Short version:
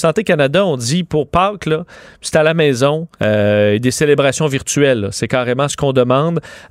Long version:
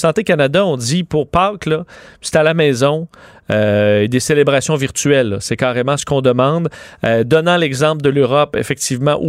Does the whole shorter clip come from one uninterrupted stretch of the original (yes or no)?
no